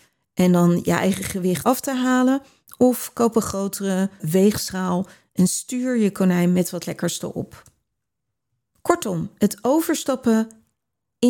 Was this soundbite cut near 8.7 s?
no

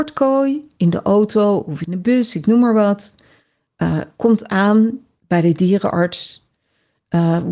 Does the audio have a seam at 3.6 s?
no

